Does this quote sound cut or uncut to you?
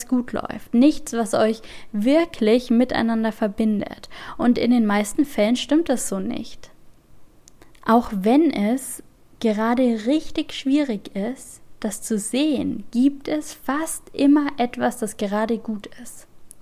uncut